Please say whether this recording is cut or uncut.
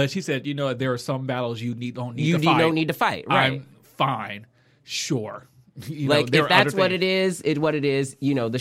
uncut